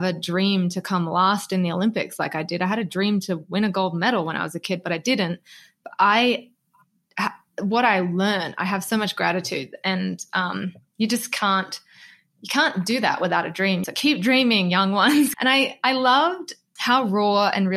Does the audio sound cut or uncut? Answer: cut